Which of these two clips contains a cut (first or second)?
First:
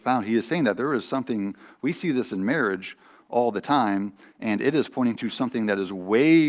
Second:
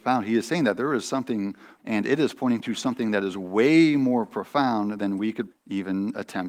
second